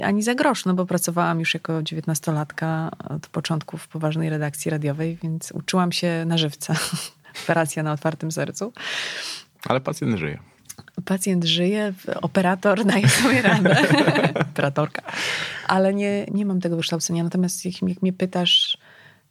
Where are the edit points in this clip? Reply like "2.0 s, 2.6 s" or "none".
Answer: none